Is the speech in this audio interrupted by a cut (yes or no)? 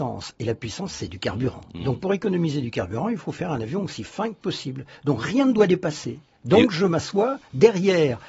no